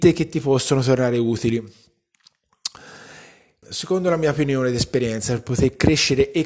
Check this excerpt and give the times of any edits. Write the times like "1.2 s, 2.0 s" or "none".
3.6 s

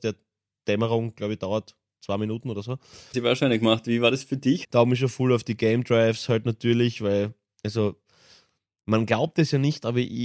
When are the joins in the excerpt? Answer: 3.1 s, 4.6 s

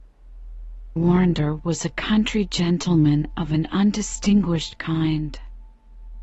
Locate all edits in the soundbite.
1.0 s

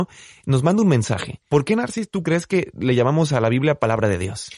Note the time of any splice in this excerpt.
1.5 s

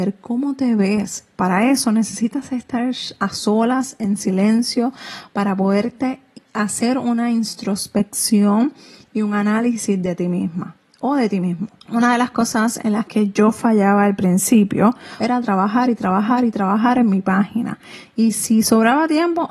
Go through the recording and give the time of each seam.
11.8 s, 15.2 s

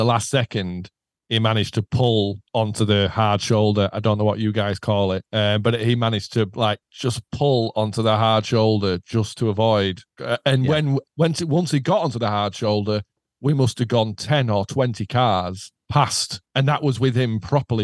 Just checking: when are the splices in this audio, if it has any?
none

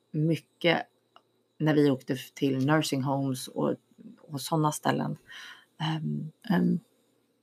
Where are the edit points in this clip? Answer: 6.4 s

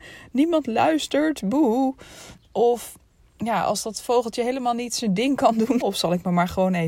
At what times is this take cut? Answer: 5.8 s

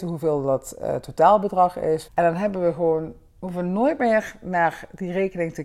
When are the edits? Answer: 2.1 s

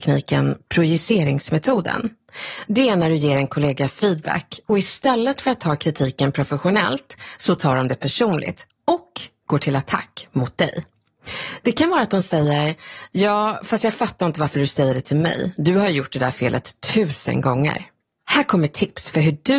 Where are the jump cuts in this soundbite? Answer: none

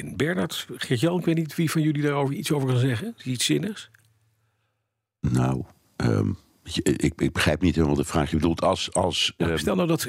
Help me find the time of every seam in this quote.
none

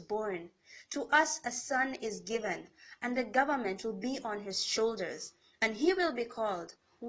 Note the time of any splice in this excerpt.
none

